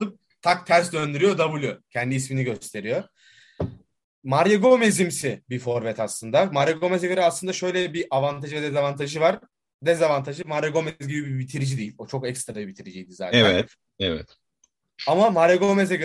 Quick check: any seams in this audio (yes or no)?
no